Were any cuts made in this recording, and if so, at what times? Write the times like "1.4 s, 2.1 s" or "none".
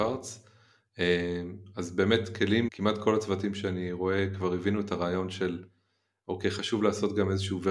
2.7 s